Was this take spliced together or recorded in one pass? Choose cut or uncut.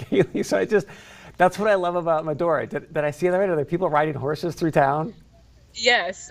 uncut